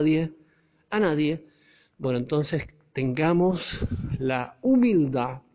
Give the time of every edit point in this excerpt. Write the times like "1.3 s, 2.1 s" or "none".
1.9 s